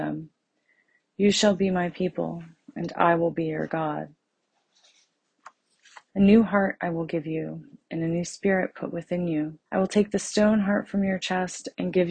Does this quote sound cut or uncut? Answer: cut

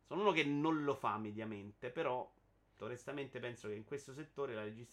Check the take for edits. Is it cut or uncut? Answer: cut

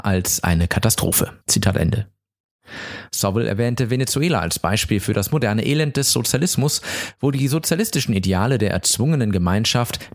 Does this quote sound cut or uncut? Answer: cut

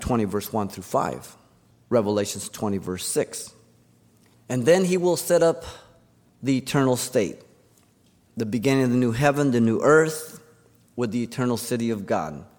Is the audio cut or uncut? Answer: cut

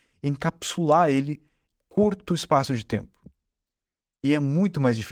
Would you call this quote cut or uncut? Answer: cut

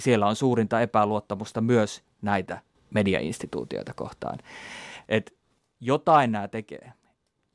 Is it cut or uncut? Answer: uncut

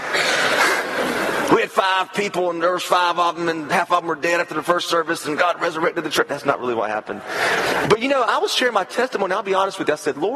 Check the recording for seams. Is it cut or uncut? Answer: uncut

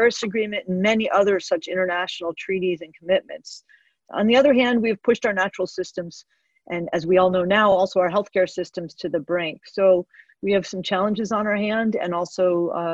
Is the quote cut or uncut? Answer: uncut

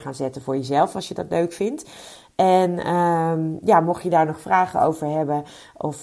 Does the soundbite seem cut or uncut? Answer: uncut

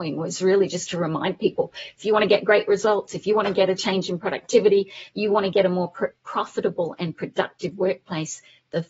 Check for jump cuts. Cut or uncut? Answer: uncut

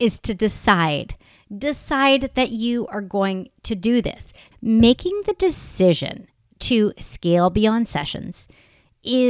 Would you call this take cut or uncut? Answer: uncut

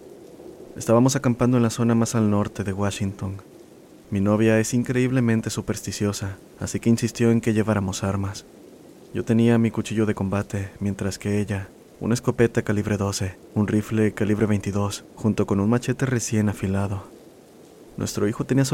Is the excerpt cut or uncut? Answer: uncut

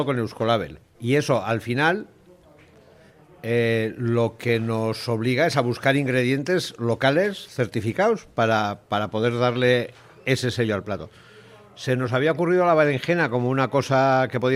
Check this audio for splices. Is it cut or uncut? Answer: cut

